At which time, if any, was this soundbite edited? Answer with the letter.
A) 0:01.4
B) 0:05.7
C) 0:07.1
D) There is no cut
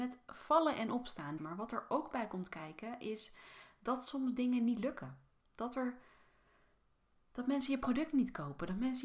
A